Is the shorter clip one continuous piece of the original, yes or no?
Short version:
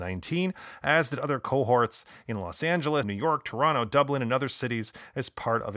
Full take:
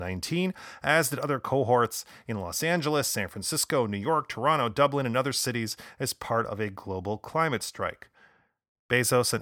no